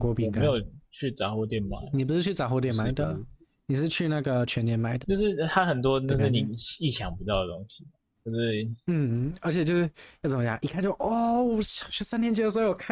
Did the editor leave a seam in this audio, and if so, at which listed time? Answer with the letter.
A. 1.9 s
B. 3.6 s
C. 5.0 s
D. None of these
C